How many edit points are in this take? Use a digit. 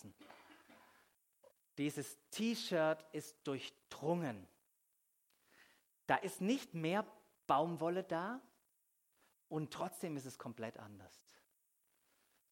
1